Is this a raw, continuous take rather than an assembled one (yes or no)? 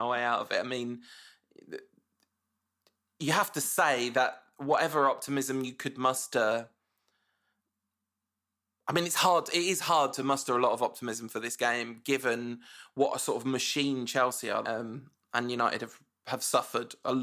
no